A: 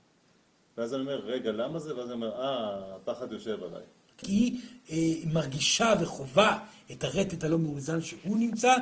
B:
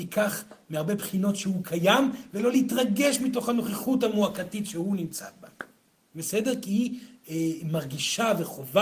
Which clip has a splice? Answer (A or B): A